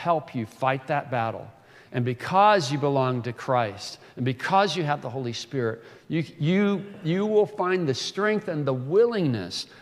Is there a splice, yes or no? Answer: no